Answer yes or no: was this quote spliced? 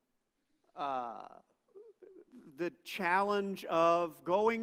no